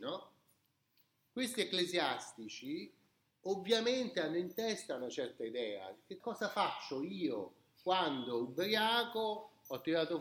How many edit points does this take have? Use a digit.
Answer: 1